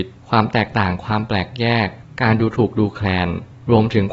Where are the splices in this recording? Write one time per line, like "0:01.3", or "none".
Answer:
none

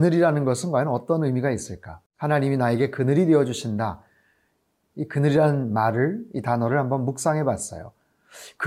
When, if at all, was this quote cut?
0:02.1
0:04.9

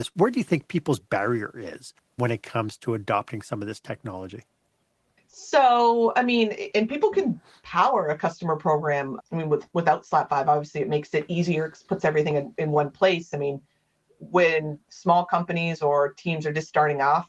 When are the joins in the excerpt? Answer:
none

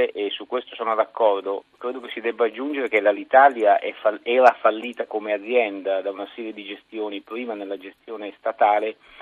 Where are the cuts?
none

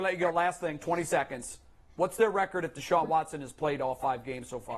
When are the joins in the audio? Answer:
none

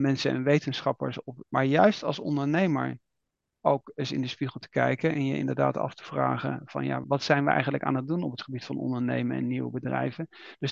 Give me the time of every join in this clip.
0:01.4
0:07.0

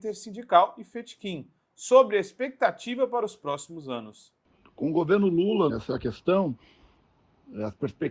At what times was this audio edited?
0:05.7

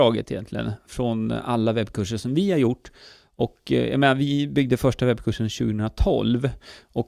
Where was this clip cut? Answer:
none

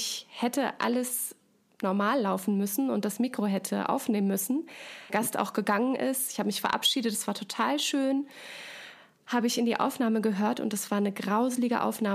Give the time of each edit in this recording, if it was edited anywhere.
0:05.1

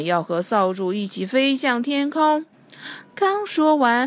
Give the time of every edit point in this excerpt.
0:02.5

